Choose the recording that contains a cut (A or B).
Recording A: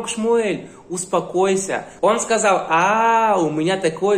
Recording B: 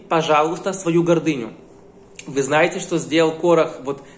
A